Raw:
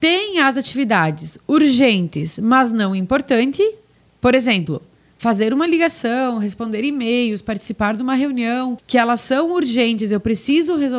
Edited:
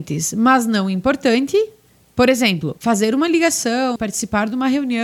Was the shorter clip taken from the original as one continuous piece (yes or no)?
no